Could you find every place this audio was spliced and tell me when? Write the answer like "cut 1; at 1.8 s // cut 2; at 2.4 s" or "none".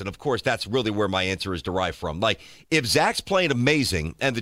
none